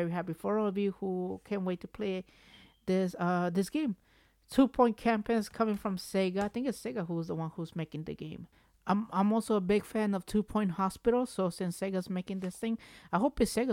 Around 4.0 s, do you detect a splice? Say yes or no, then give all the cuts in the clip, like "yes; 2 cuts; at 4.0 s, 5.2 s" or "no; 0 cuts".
no; 0 cuts